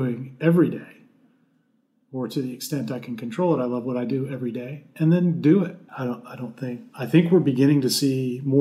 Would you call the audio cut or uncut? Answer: cut